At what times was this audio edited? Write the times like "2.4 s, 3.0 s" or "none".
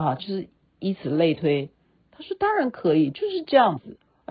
none

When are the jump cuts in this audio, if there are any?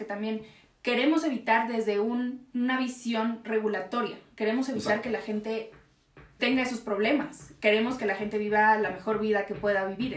6.4 s

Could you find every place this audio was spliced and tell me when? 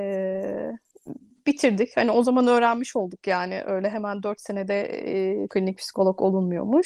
5.5 s

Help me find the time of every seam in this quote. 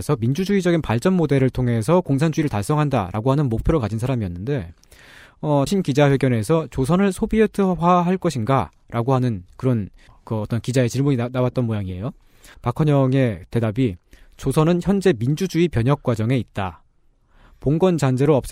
5.7 s

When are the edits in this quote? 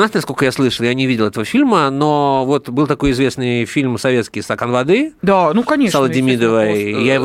none

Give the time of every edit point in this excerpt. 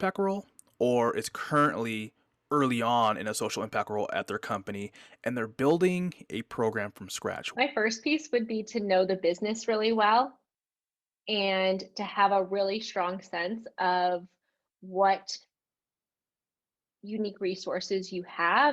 7.5 s

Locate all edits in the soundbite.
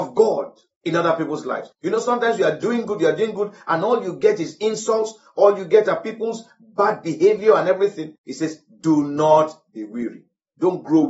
1.7 s

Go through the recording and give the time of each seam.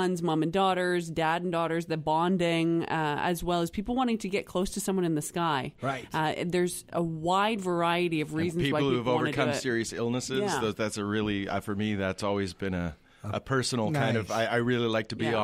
none

